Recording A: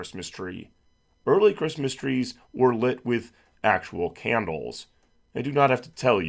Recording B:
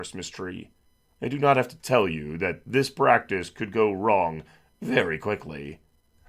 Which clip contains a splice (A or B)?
B